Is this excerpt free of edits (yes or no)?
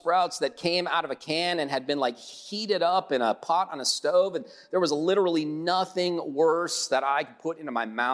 yes